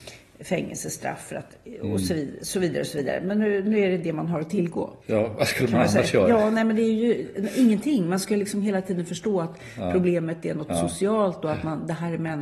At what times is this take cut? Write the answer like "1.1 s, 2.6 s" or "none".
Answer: 5.0 s